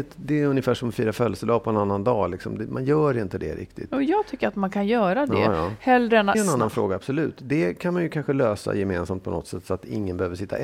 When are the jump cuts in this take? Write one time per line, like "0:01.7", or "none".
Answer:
0:06.3